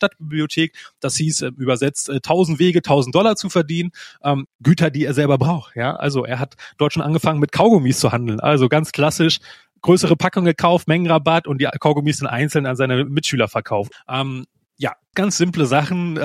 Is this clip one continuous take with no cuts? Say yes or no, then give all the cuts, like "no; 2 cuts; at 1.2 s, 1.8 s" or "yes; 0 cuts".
no; 3 cuts; at 4.5 s, 13.9 s, 15.1 s